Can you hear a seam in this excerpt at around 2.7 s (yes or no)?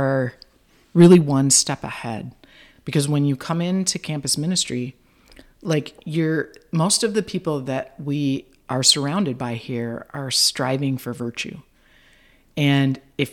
no